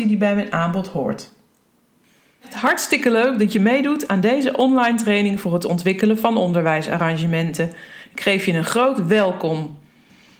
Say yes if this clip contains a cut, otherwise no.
no